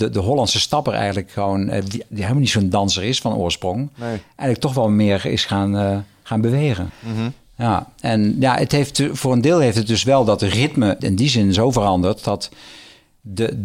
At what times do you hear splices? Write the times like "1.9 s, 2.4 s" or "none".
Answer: 6.9 s, 11.0 s